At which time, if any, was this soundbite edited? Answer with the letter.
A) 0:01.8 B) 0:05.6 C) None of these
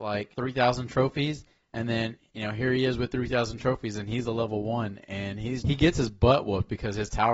B